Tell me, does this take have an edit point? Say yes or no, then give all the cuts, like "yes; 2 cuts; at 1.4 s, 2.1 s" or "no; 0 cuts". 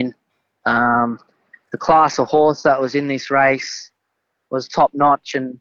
no; 0 cuts